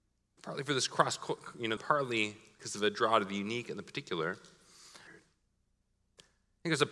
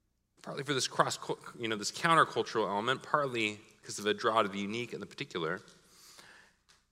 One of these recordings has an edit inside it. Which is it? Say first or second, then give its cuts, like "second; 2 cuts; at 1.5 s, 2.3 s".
first; 2 cuts; at 1.8 s, 5.1 s